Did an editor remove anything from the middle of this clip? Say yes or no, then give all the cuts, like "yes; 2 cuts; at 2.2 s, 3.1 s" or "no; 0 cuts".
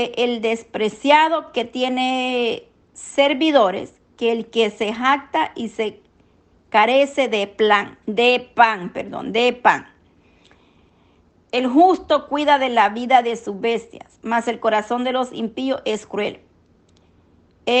yes; 2 cuts; at 8.0 s, 11.5 s